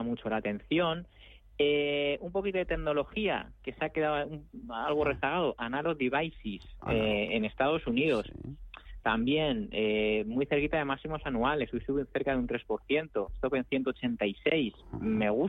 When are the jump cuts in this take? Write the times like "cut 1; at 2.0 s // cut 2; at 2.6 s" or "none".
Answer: none